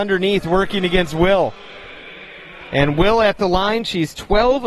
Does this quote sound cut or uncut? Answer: uncut